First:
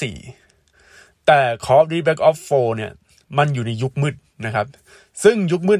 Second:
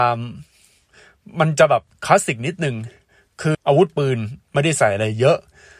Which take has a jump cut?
second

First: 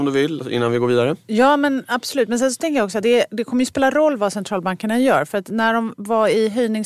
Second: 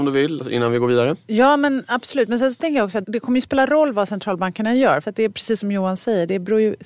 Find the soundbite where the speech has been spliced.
second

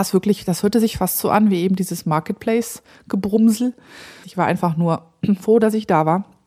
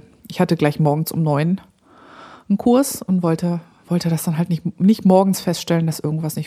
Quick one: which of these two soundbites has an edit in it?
first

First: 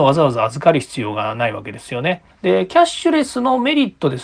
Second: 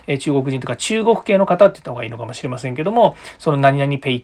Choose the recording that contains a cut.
first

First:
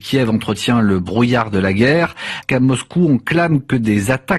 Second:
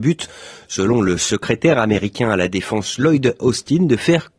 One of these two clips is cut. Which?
first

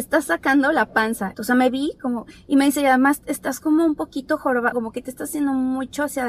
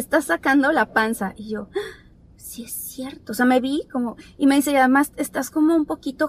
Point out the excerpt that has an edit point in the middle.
first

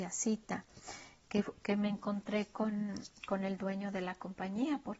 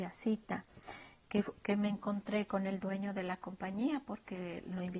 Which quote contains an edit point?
second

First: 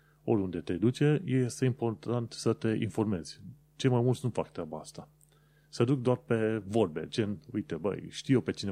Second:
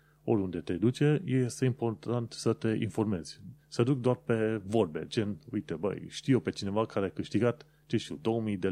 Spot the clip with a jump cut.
second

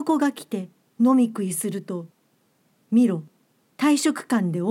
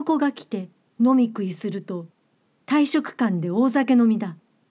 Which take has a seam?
second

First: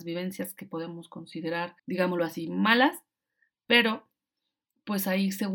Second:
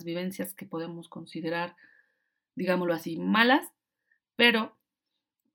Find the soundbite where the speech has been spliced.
first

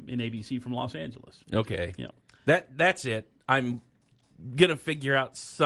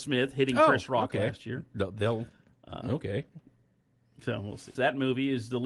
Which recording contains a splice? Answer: second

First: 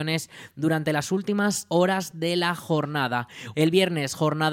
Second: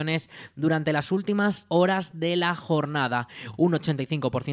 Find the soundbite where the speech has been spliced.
first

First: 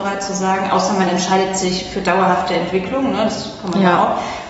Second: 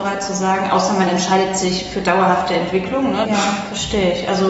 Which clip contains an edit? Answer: second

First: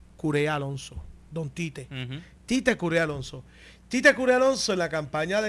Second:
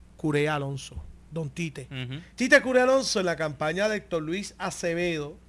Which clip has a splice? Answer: second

